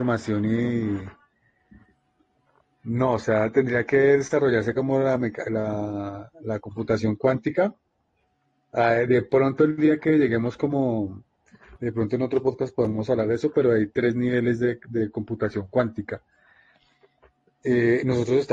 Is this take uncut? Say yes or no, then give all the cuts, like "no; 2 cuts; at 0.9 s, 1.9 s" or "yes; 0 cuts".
yes; 0 cuts